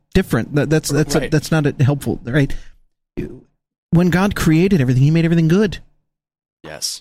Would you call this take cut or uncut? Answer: uncut